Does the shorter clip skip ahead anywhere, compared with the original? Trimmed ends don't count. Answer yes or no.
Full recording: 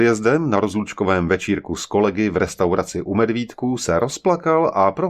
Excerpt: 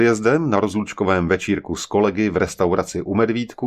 no